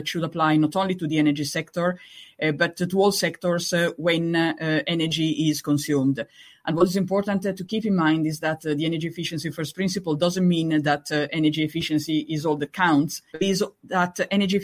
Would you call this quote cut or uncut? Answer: cut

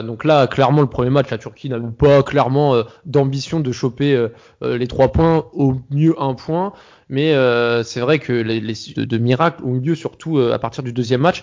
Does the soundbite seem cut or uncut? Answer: cut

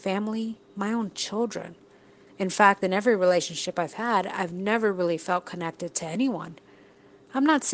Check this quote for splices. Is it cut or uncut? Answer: uncut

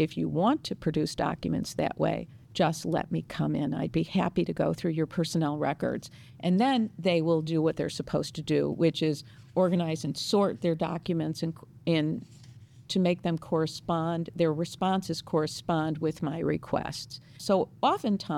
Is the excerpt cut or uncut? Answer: cut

